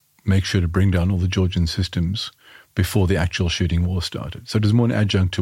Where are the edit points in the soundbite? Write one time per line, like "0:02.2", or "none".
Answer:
none